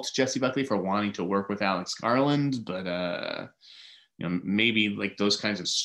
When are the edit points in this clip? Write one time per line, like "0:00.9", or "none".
none